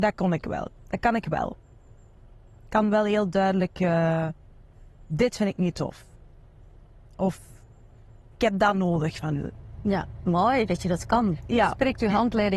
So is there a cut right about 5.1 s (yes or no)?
yes